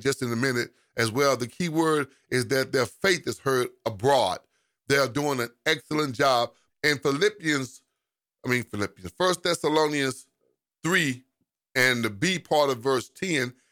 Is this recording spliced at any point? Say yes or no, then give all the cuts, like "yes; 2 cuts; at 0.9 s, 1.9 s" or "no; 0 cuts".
yes; 1 cut; at 6.7 s